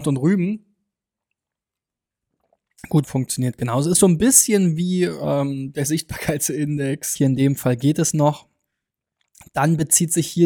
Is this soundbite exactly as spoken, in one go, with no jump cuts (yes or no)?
no